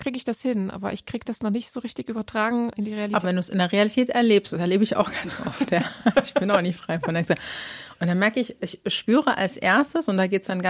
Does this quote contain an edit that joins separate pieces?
yes; 1 cut; at 3.2 s

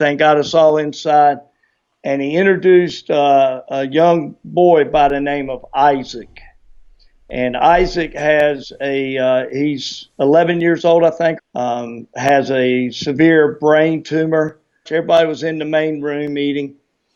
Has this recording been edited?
yes; 2 cuts; at 11.4 s, 14.9 s

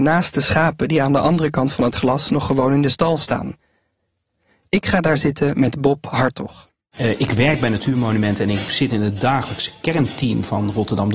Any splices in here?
no; 0 cuts

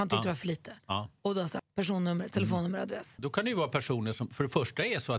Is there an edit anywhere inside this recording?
yes; 2 cuts; at 1.6 s, 3.2 s

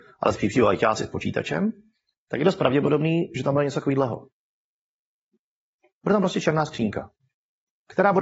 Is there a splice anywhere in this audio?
no; 0 cuts

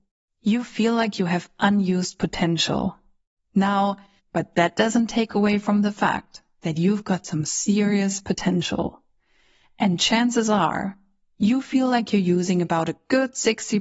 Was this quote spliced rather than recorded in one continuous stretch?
yes; 1 cut; at 4.2 s

